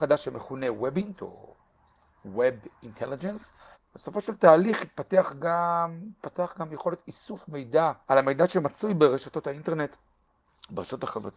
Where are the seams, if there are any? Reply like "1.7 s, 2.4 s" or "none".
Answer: 3.7 s, 8.0 s